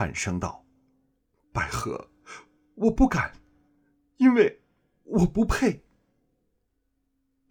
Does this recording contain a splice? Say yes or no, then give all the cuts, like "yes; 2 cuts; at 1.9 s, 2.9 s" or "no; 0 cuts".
no; 0 cuts